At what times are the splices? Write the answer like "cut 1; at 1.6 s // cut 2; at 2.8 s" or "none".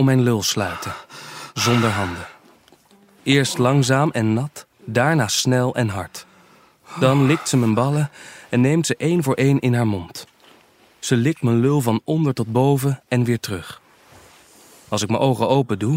cut 1; at 4.7 s